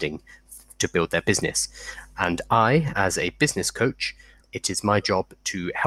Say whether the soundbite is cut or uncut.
cut